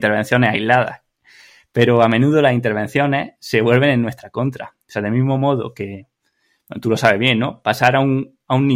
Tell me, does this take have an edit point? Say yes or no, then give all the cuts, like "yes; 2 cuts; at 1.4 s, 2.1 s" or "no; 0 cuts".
no; 0 cuts